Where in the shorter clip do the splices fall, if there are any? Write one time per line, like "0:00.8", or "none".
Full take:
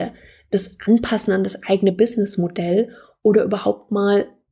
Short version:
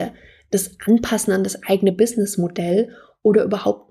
none